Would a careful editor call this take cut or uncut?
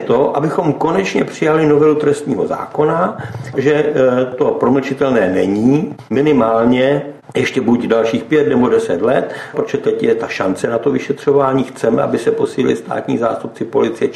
cut